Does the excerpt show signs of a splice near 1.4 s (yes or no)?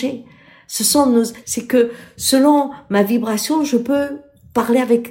yes